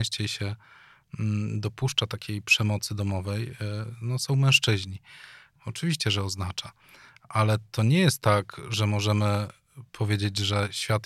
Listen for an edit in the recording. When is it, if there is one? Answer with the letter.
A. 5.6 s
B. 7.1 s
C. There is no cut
A